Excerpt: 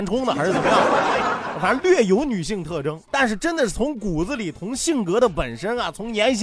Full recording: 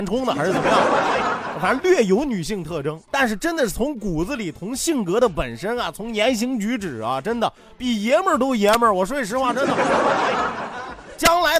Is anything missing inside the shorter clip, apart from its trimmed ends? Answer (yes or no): no